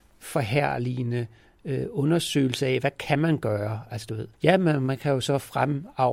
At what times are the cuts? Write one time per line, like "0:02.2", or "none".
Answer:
0:04.3